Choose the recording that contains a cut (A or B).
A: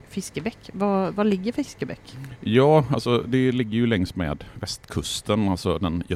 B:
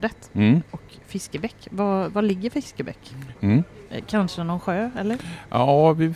B